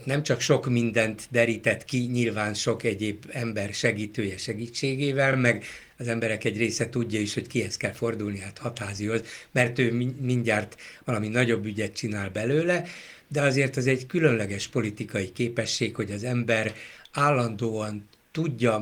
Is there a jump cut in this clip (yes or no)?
no